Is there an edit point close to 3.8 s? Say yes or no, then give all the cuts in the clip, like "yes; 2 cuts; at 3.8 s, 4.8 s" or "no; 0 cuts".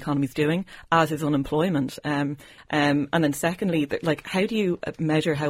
no; 1 cut; at 2.6 s